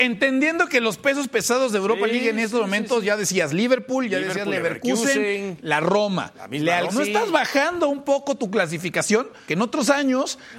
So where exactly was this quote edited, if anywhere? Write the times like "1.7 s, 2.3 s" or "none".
6.9 s, 9.5 s